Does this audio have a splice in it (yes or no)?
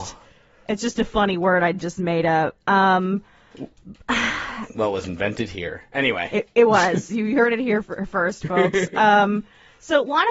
no